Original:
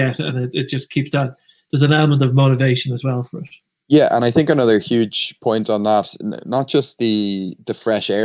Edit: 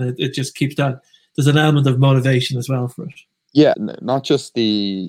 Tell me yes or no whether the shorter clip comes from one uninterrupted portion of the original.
no